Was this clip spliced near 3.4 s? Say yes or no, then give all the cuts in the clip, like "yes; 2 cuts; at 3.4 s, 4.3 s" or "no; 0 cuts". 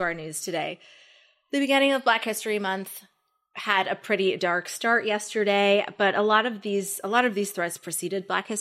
no; 0 cuts